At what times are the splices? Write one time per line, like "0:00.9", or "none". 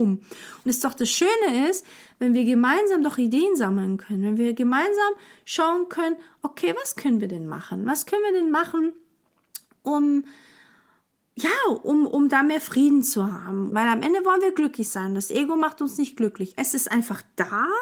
0:13.7
0:16.6